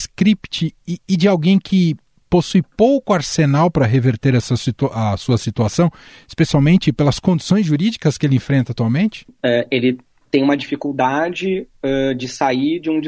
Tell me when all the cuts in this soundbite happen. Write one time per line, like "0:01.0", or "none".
0:09.3